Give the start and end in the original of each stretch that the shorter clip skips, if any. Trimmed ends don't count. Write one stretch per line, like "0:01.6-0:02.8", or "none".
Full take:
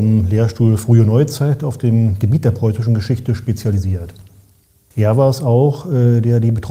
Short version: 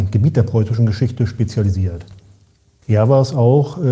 none

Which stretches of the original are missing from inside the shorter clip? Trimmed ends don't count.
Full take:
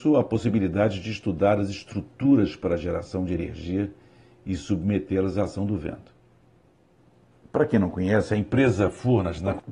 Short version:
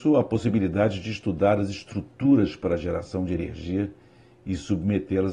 none

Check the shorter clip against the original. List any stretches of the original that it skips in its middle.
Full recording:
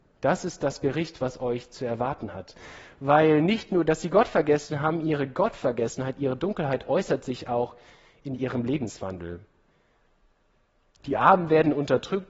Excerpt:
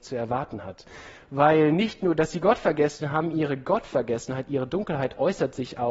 none

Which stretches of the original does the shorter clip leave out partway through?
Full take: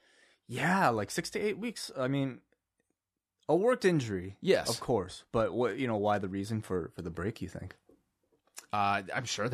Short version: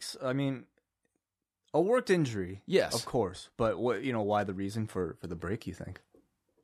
none

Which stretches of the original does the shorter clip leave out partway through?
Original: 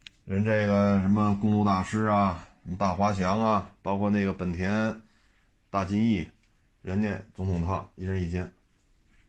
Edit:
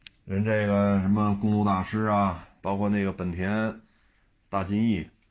0:02.6-0:03.8

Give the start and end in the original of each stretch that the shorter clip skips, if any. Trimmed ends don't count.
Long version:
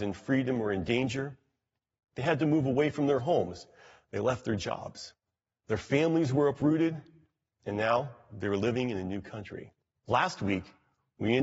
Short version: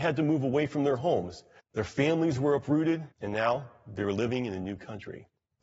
0:03.8-0:05.5
0:07.0-0:07.6

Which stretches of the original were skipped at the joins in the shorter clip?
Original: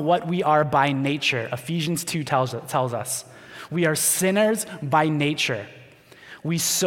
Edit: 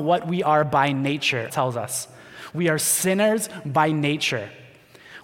0:01.5-0:02.7

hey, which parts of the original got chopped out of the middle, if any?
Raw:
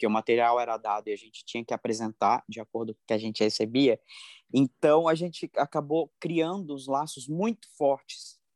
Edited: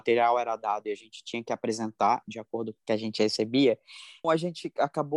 0:04.5-0:05.0

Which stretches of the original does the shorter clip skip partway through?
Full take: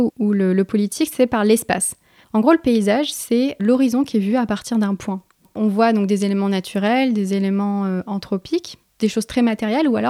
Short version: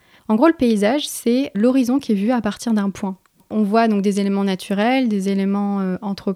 none

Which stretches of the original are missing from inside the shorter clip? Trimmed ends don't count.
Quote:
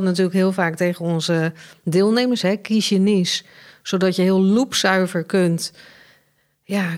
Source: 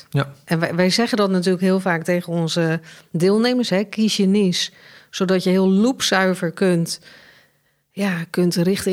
none

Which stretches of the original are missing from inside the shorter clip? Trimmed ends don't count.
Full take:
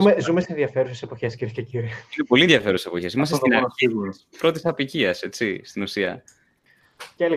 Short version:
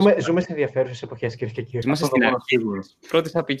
0:01.8-0:03.1

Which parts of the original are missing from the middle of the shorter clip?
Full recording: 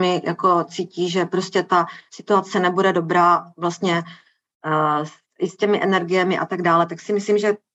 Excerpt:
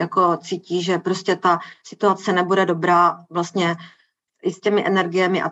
0:04.5-0:05.2

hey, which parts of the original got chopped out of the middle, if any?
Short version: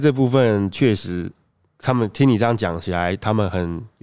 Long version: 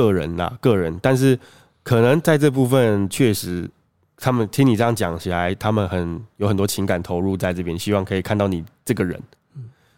none

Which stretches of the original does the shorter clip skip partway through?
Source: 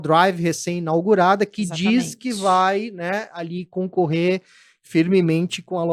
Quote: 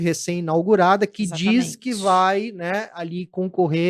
none

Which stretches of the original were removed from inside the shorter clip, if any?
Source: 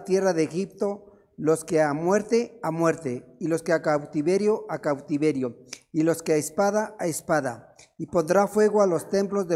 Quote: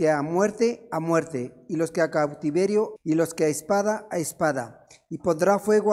0:04.7-0:05.8

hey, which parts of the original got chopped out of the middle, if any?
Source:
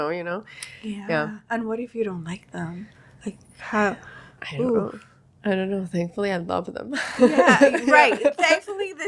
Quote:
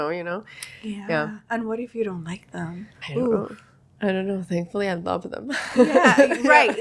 0:03.0-0:04.4

